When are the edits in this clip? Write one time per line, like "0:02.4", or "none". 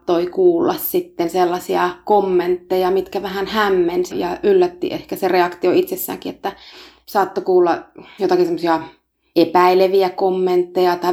0:04.1